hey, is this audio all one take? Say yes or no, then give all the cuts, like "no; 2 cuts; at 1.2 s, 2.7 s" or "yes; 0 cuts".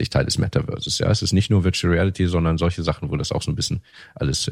yes; 0 cuts